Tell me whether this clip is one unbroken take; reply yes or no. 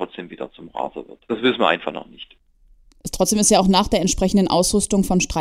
yes